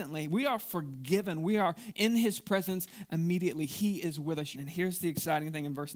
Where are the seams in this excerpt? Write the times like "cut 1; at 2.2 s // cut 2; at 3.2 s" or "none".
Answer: cut 1; at 4.5 s